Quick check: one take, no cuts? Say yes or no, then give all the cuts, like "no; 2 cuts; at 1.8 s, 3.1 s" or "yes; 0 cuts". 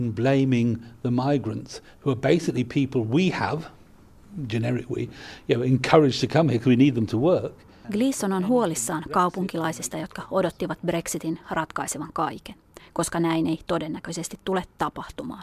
no; 1 cut; at 7.8 s